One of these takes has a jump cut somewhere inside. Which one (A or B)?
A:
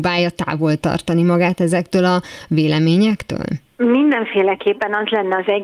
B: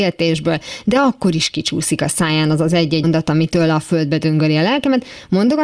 B